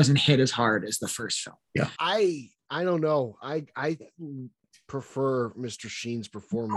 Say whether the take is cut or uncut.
cut